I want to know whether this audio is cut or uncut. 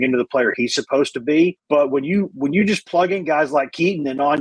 uncut